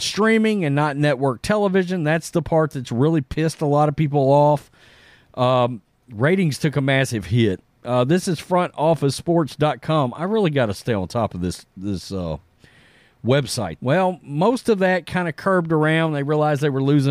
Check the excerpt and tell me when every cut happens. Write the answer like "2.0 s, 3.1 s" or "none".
13.8 s